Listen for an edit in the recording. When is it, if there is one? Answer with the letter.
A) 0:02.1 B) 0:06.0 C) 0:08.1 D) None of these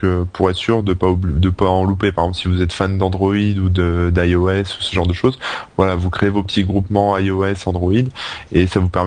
D